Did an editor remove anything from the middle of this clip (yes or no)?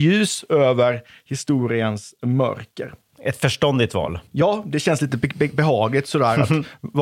yes